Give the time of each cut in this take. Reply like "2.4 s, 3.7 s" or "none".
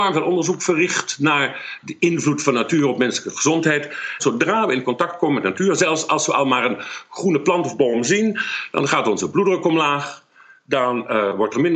4.2 s